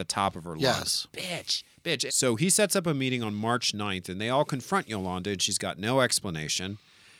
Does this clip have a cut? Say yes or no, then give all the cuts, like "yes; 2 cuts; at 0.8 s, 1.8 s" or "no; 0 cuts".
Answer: yes; 1 cut; at 2.1 s